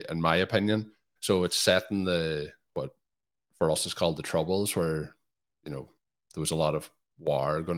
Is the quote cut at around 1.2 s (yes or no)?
yes